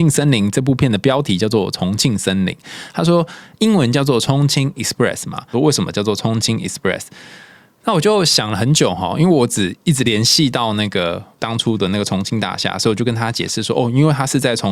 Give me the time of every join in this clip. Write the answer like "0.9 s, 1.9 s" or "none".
5.5 s